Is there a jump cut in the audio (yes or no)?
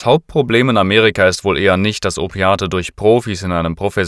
no